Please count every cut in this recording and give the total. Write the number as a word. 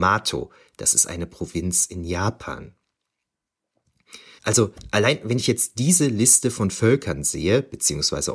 one